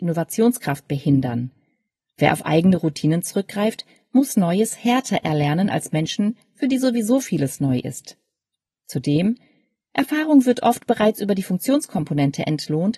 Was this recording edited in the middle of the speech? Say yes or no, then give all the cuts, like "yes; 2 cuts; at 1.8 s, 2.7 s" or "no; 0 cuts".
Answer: no; 0 cuts